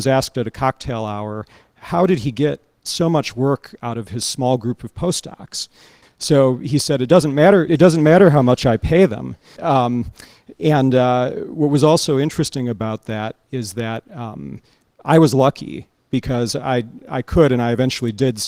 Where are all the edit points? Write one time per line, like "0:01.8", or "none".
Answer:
0:06.0
0:07.7
0:09.6